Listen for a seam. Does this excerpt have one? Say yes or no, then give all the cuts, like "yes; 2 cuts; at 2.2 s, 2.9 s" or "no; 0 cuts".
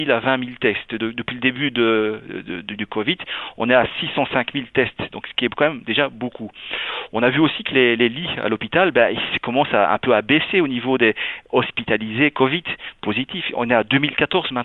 no; 0 cuts